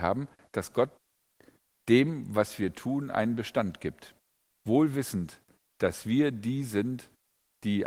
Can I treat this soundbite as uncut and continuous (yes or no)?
no